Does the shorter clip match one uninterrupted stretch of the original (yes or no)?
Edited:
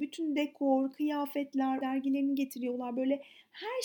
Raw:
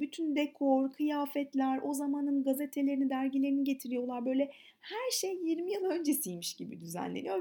no